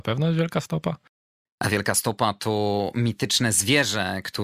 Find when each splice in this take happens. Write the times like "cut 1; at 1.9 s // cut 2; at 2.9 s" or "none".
none